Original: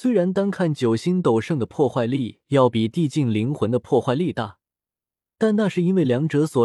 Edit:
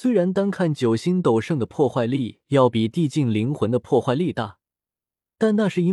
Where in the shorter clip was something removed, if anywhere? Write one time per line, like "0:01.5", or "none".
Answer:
none

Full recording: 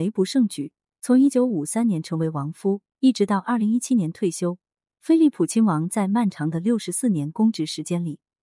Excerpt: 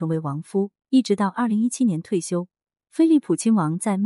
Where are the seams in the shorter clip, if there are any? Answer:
none

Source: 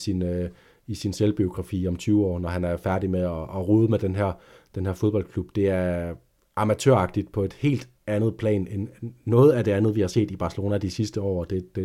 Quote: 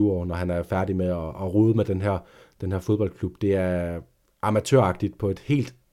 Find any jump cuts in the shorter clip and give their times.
none

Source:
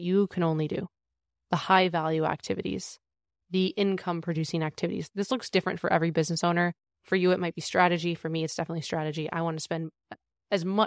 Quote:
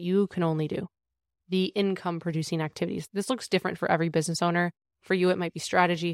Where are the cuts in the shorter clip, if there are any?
0:01.3

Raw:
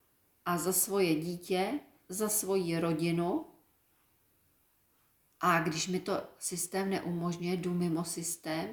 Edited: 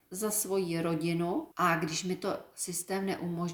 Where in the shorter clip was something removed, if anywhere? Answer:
0:01.5

